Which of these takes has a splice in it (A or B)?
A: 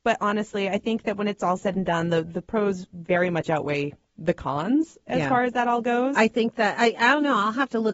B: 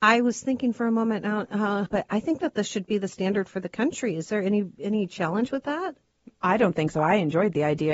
B